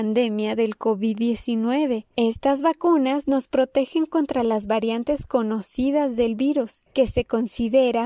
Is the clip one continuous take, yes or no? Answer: no